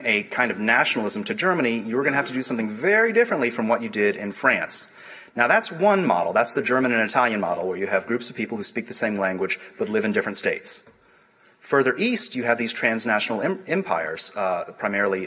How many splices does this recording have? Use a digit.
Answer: 0